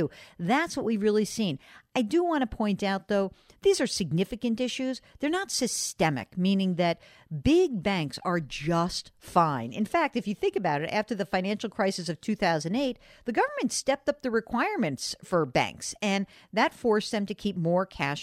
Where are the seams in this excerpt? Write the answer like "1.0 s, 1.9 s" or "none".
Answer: none